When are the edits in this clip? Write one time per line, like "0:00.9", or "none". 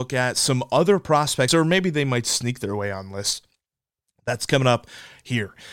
0:01.5